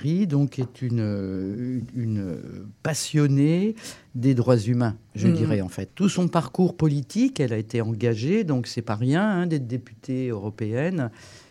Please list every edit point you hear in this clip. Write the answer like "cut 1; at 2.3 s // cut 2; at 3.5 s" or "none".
cut 1; at 5.9 s